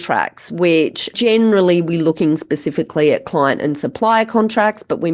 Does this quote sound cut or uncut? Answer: uncut